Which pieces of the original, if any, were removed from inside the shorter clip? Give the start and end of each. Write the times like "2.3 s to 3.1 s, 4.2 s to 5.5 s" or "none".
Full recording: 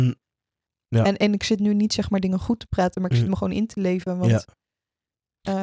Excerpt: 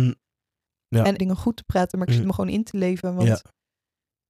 1.2 s to 2.2 s